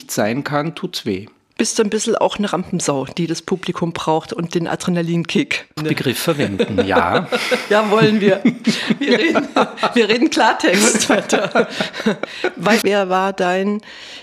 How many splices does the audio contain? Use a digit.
2